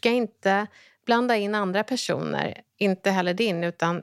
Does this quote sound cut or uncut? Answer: uncut